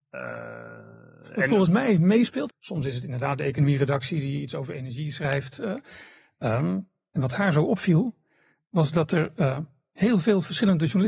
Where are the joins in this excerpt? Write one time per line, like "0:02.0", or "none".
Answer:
0:02.5
0:05.6